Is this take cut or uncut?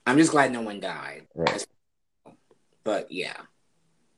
cut